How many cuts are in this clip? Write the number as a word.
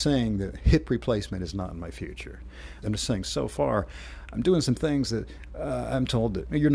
one